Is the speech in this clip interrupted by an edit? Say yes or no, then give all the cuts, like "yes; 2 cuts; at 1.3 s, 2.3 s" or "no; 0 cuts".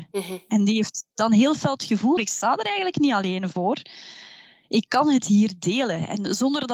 yes; 1 cut; at 2.2 s